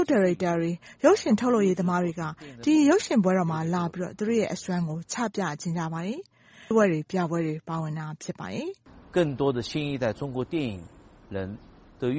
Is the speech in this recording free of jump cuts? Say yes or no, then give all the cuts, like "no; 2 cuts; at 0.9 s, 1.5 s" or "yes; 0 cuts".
no; 1 cut; at 6.7 s